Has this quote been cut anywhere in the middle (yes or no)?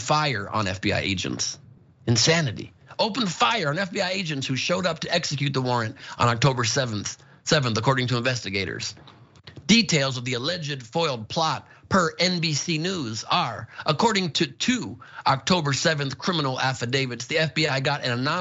no